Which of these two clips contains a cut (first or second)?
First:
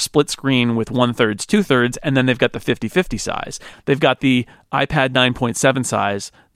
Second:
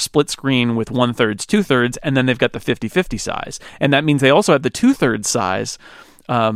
first